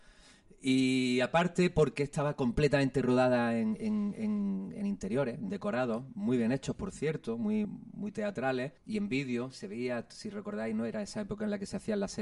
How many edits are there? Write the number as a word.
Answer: two